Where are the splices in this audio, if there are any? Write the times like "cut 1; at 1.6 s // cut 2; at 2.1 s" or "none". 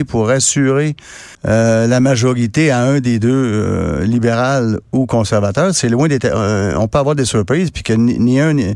cut 1; at 1.3 s